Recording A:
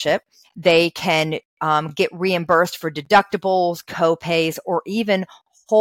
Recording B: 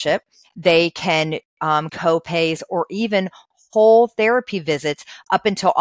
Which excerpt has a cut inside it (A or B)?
B